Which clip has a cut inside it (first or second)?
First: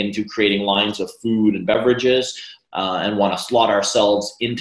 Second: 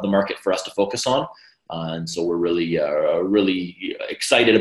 first